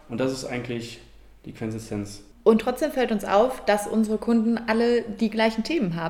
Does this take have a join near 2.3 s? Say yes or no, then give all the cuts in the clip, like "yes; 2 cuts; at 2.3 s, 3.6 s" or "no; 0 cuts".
yes; 1 cut; at 2.3 s